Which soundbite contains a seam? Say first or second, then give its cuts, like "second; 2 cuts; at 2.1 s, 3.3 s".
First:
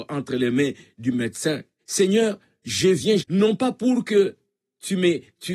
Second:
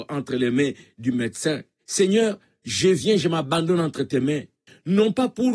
first; 1 cut; at 3.2 s